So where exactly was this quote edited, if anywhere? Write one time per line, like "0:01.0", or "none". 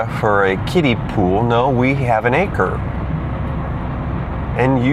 none